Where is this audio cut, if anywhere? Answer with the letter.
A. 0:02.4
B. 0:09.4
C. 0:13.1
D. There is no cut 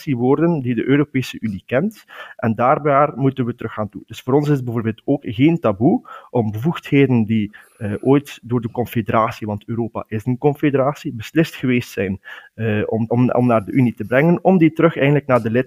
C